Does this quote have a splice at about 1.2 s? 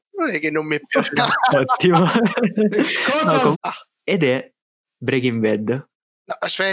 yes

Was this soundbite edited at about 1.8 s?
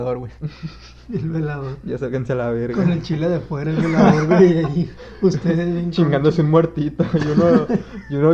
no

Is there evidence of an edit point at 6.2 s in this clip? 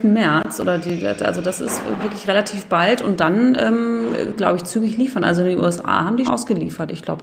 yes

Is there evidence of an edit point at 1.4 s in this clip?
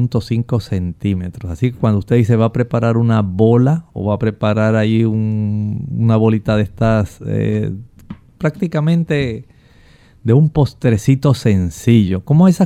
no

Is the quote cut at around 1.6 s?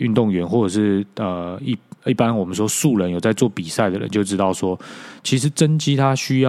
no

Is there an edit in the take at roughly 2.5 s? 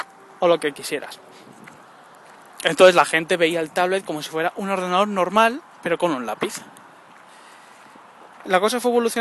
no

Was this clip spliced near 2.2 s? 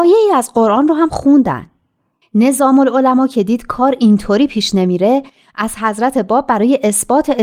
yes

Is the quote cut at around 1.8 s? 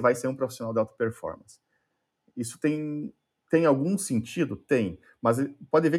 no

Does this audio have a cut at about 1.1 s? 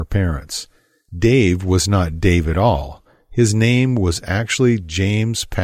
no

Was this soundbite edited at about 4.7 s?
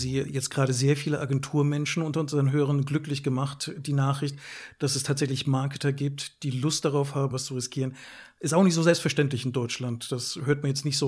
no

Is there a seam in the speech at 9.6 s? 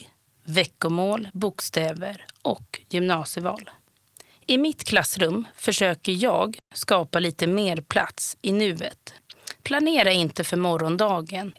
no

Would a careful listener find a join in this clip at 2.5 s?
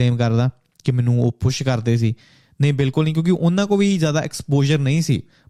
no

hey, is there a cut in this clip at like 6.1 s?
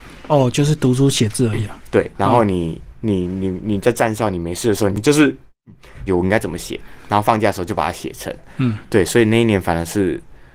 yes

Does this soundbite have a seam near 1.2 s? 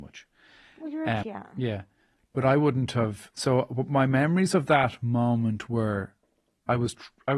yes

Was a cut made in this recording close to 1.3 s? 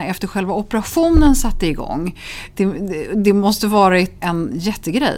no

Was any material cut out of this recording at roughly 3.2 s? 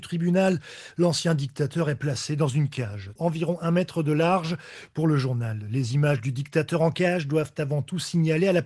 yes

